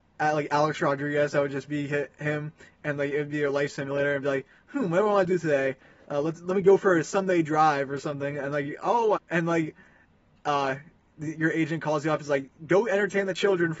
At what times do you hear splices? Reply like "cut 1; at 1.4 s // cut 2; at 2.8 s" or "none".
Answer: cut 1; at 9.2 s